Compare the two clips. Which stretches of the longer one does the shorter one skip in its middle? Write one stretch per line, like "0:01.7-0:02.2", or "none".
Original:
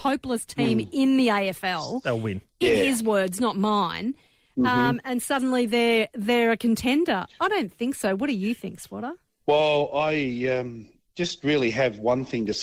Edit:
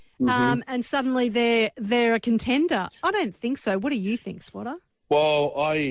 none